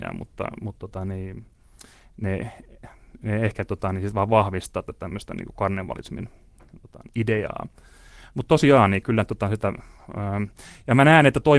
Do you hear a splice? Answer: yes; 1 cut; at 7.1 s

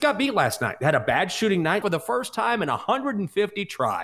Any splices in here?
yes; 1 cut; at 1.8 s

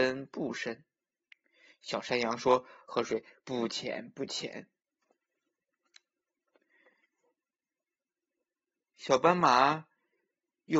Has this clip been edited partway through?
yes; 1 cut; at 5.0 s

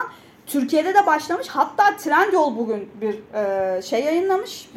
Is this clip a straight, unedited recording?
yes; 0 cuts

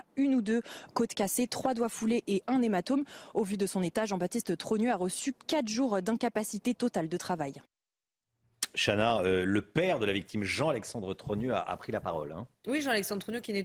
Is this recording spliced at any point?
no; 0 cuts

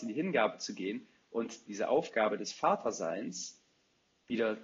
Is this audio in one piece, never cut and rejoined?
no; 1 cut; at 1.7 s

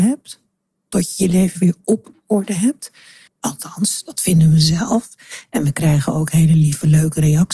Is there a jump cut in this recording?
yes; 1 cut; at 3.3 s

